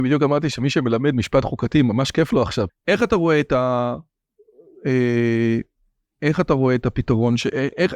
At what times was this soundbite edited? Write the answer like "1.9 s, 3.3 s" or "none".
2.7 s